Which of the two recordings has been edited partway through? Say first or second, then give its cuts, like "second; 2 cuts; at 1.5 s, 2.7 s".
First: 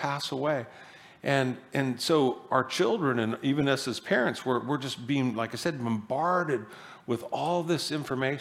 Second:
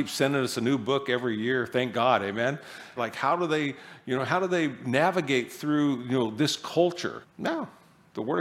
second; 2 cuts; at 3.0 s, 7.2 s